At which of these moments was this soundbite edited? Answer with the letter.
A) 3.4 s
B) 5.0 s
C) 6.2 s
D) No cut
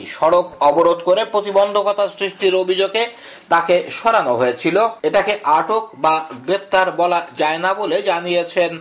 B